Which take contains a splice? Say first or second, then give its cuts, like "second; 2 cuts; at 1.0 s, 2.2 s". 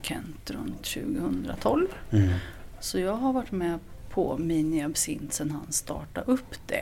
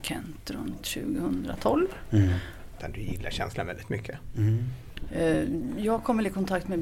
second; 1 cut; at 2.8 s